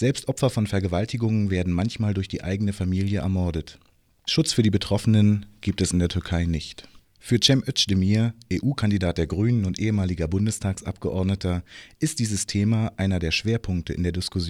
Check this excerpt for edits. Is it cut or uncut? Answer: uncut